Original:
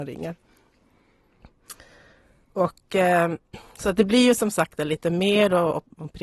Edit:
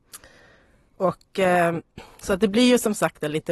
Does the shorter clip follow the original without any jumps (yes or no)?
yes